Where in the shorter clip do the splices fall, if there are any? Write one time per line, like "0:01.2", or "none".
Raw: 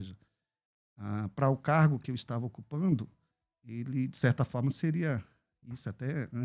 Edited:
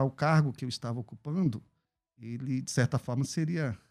none